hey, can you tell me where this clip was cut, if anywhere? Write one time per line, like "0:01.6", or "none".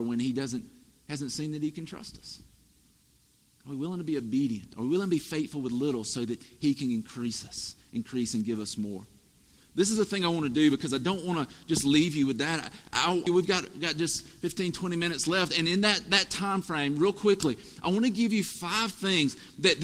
0:13.3